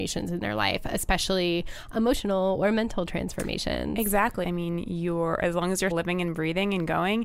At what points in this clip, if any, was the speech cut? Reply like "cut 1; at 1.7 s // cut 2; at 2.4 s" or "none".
cut 1; at 4.4 s // cut 2; at 5.9 s